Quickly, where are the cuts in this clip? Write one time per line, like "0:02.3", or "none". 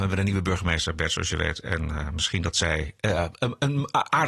none